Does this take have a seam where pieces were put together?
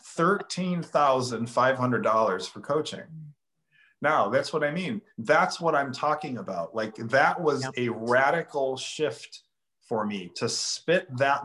no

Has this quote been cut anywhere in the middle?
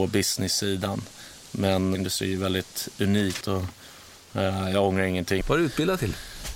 yes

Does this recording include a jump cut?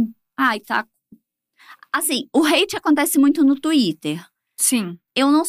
no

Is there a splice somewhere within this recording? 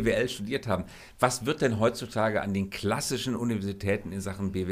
no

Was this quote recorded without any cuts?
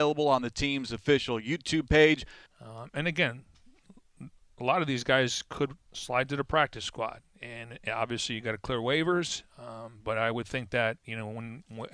no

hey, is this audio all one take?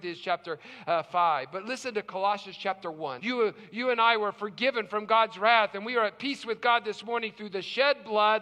no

